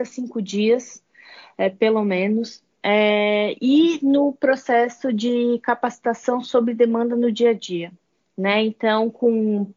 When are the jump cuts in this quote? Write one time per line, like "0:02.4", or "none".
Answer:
none